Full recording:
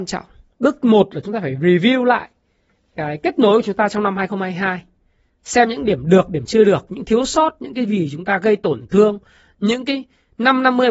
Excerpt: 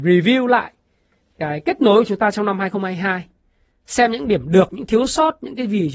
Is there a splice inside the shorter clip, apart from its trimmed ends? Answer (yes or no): yes